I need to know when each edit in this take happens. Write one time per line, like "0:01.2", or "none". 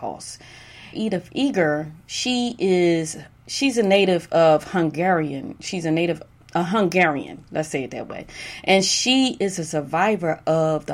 0:00.9